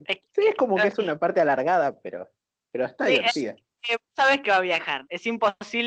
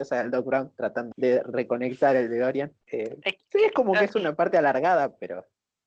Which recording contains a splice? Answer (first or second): second